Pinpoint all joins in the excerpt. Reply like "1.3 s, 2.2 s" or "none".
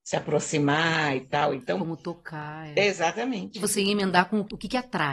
none